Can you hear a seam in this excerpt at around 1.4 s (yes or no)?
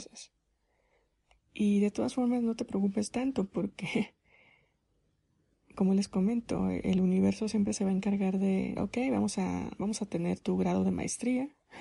yes